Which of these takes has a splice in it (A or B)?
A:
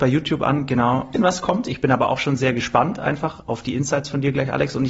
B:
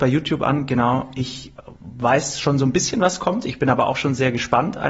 A